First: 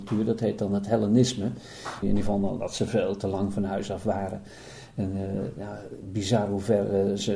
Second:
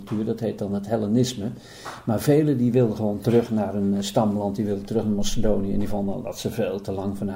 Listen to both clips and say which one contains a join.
first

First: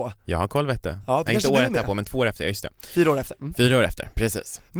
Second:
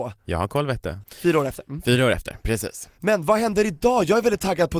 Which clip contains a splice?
second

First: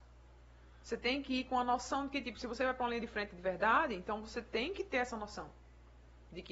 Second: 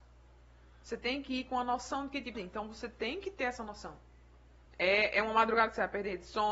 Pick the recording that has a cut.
second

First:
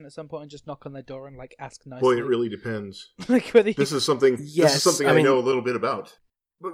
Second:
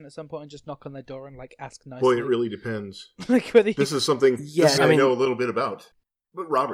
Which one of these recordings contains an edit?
second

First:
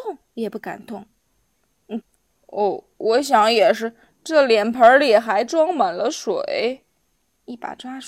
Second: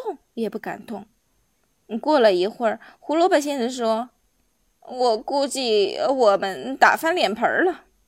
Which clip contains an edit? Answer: first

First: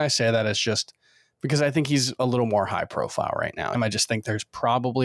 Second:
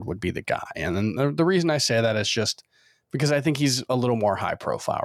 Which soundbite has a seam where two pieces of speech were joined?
first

